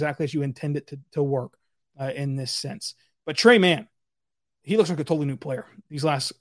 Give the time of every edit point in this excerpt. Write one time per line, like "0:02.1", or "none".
0:04.5